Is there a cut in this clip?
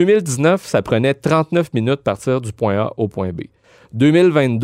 no; 0 cuts

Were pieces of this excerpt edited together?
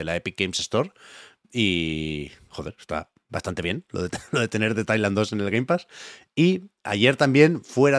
no; 0 cuts

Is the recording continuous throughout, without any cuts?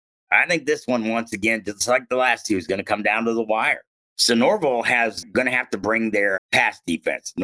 no; 2 cuts; at 4.1 s, 6.4 s

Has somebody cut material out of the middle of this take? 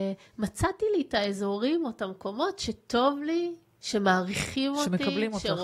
no; 0 cuts

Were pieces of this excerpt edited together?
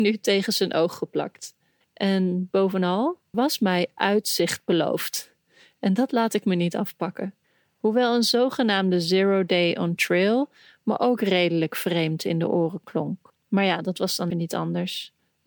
yes; 3 cuts; at 1.8 s, 3.3 s, 14.3 s

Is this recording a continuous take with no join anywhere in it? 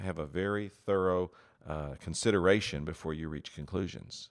no; 1 cut; at 1.5 s

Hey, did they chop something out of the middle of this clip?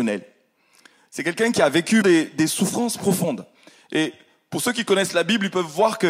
yes; 1 cut; at 2.0 s

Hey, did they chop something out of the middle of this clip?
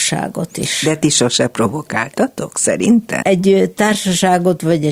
yes; 1 cut; at 3.2 s

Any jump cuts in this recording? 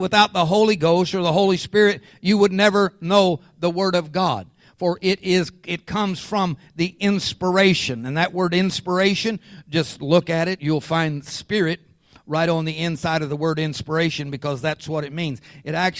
no; 0 cuts

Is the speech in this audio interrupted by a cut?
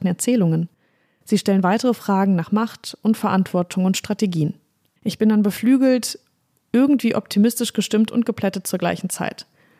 yes; 1 cut; at 5.0 s

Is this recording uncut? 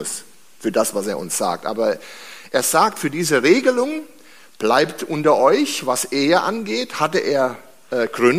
yes; 0 cuts

